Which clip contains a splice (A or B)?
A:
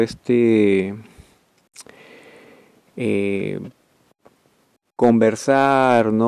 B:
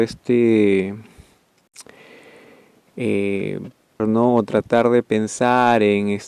B